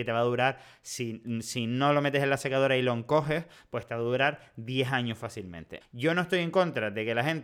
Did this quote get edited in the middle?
yes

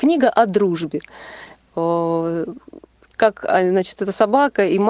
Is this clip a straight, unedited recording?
yes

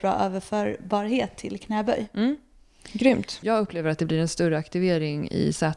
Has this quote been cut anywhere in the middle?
yes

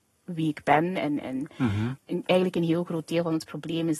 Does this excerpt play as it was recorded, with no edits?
no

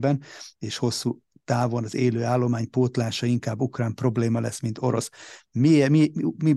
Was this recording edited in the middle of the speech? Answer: no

